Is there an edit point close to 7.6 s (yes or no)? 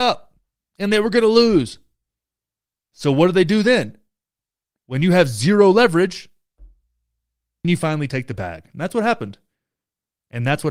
yes